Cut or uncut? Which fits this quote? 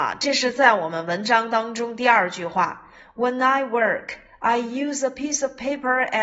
uncut